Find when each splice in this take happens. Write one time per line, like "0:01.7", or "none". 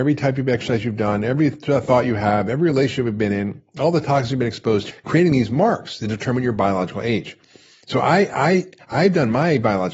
0:04.9

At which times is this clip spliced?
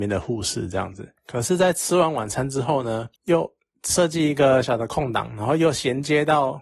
0:01.2
0:04.6

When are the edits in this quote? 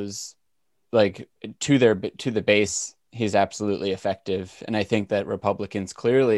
none

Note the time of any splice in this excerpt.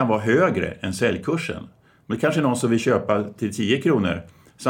none

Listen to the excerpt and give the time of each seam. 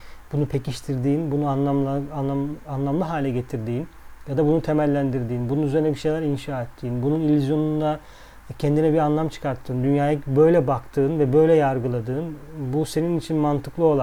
none

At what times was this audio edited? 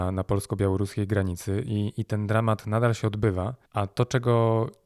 0:03.7

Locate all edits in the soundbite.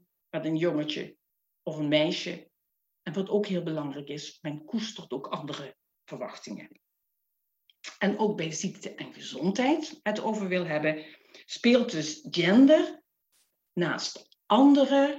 0:10.0

